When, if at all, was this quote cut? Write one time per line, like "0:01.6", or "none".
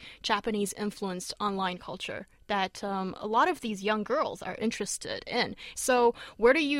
0:05.7